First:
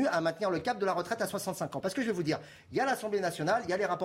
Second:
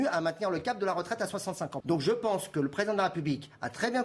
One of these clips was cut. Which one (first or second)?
second